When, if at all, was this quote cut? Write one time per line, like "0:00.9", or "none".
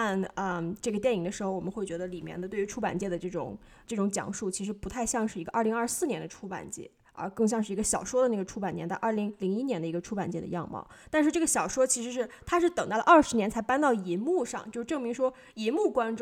none